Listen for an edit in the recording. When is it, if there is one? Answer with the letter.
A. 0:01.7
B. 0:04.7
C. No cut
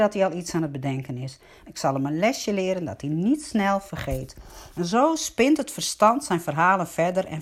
A